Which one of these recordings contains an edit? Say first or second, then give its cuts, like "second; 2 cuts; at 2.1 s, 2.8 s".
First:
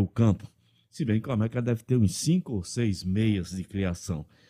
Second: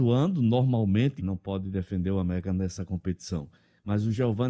second; 1 cut; at 1.2 s